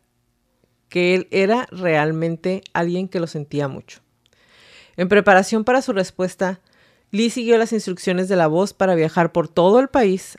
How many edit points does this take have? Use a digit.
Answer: 0